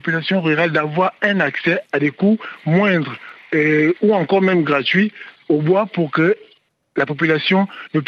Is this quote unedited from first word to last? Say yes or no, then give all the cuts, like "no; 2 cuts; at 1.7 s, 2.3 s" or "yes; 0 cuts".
yes; 0 cuts